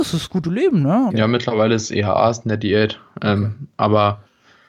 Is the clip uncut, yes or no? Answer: no